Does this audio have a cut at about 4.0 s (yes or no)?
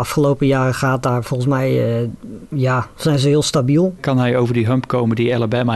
yes